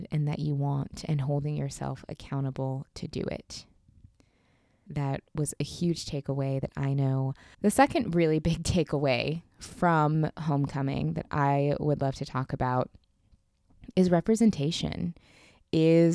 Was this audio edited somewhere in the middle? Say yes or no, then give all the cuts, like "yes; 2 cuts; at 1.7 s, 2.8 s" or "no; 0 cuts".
yes; 2 cuts; at 4.9 s, 7.5 s